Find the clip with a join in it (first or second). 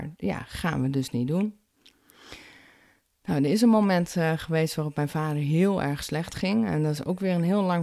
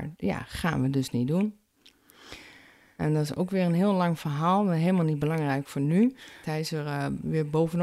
second